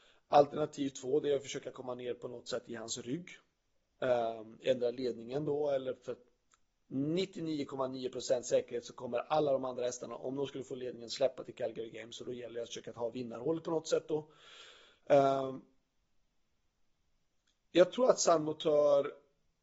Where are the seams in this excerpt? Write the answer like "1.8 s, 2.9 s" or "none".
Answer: none

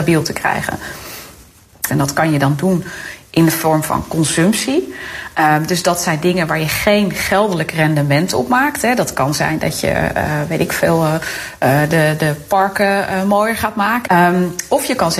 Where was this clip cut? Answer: 1.9 s, 14.1 s

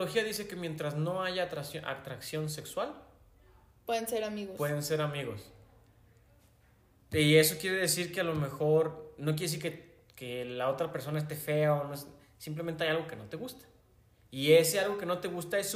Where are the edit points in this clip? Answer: none

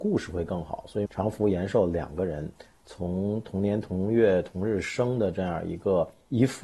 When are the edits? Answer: 1.1 s

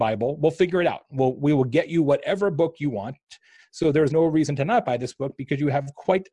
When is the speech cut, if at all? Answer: 4.1 s

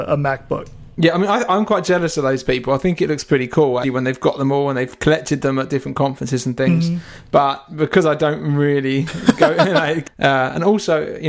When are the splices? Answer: 3.8 s, 10.0 s

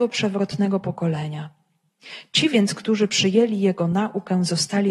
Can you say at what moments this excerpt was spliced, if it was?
none

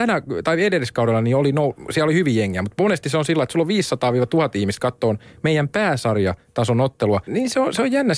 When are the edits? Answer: 7.3 s

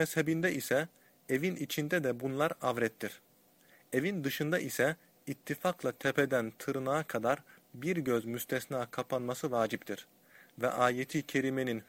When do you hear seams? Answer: none

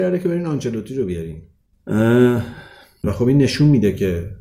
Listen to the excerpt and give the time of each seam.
3.0 s

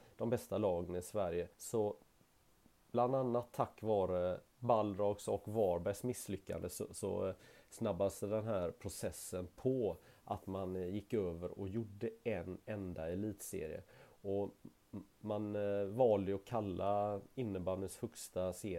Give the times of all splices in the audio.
1.5 s

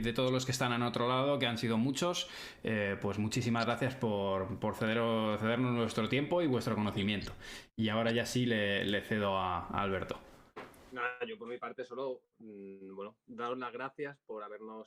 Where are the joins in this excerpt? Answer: none

